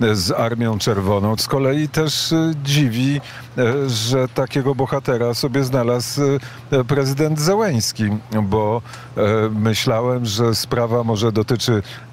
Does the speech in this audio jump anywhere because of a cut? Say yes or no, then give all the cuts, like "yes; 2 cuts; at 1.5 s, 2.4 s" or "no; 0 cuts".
yes; 1 cut; at 1.4 s